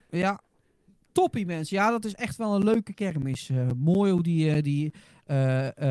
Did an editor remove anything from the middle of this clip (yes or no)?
no